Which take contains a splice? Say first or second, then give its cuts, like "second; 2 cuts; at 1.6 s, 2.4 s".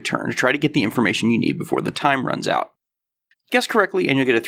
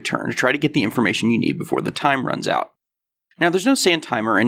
first; 1 cut; at 3.3 s